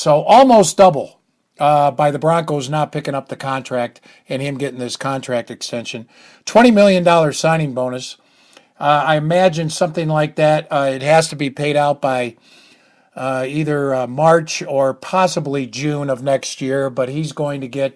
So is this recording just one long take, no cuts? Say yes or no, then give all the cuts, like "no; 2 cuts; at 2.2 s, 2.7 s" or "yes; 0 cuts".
yes; 0 cuts